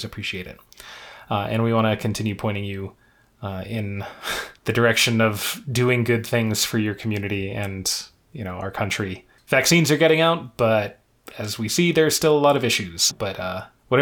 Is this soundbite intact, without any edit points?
no; 1 cut; at 13.1 s

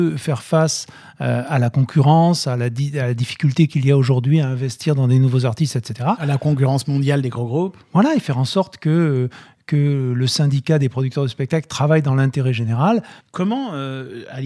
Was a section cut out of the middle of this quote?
yes; 1 cut; at 13.2 s

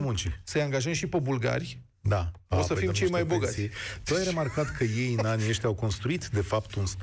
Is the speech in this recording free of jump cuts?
yes; 0 cuts

